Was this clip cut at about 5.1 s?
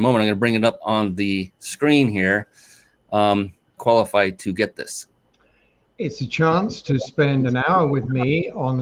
no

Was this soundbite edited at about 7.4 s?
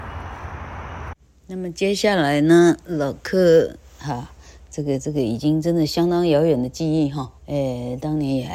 yes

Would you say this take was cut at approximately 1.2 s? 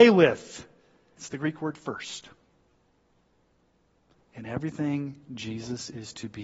yes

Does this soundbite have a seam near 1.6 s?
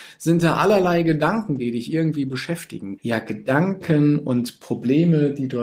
no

